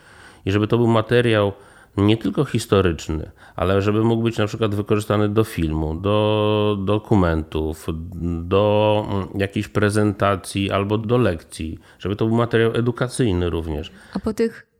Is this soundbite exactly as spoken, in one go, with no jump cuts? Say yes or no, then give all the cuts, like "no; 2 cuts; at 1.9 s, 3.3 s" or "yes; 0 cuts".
yes; 0 cuts